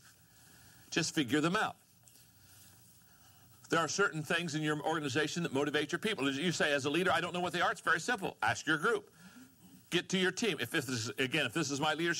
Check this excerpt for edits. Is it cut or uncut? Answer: uncut